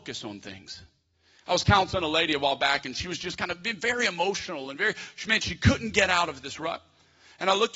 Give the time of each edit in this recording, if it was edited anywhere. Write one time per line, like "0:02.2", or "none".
none